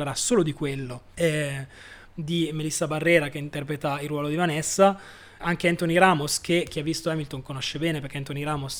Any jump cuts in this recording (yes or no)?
yes